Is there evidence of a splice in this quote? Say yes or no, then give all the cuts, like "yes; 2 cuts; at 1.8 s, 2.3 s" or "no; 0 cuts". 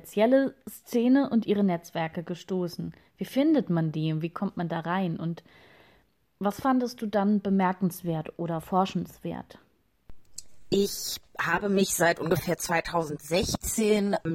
no; 0 cuts